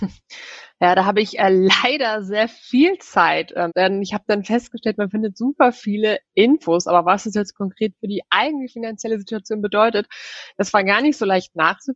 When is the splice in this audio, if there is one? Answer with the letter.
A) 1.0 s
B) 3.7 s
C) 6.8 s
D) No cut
B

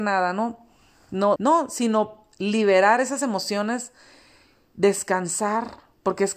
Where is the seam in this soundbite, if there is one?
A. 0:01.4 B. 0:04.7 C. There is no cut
A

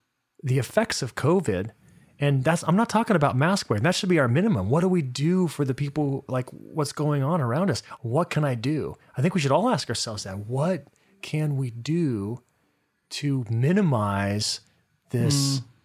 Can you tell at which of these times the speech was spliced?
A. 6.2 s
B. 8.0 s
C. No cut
B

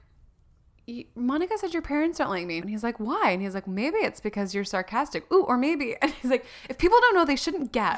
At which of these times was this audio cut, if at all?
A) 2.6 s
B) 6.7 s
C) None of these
A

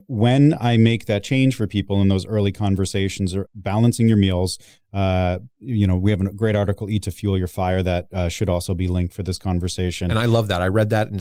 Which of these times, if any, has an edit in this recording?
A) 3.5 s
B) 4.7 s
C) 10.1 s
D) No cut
A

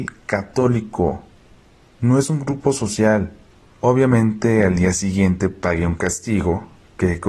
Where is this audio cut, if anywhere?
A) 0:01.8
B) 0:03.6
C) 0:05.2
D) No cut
B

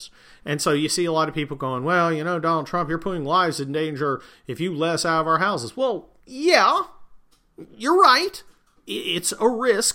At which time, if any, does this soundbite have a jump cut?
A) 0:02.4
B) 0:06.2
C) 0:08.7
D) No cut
B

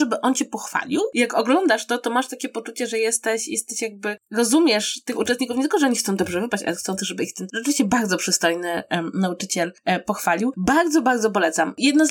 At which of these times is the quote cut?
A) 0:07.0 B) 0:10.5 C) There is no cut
C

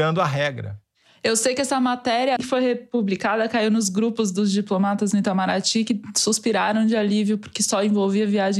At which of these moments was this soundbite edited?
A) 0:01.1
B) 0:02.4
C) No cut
B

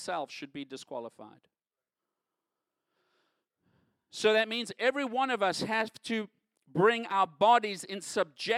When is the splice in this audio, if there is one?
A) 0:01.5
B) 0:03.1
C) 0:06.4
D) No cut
D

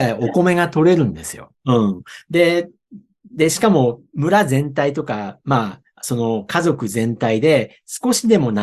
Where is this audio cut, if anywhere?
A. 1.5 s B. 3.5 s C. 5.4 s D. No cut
A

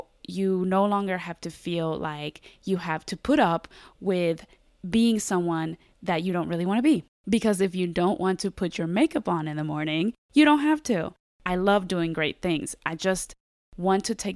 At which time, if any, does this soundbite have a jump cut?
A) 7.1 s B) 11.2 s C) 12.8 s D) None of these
B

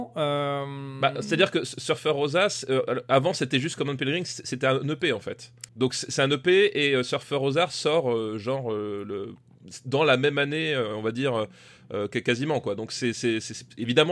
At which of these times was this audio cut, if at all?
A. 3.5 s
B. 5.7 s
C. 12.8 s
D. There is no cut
B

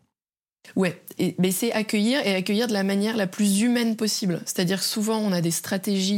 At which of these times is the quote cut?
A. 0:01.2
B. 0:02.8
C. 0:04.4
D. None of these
A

